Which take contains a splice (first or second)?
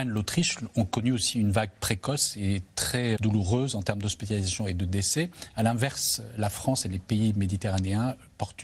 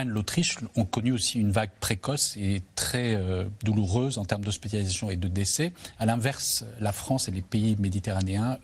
first